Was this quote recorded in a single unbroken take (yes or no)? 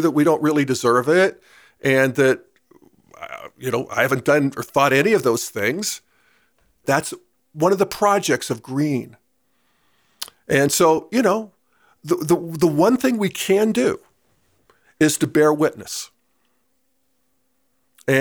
no